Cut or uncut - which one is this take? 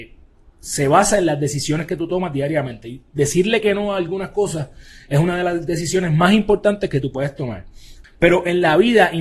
cut